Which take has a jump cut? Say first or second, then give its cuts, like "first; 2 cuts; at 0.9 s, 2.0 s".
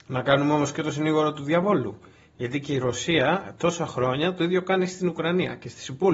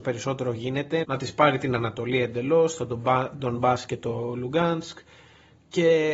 second; 1 cut; at 1.0 s